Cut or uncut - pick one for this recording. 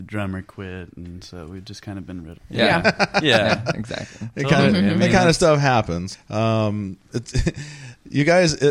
cut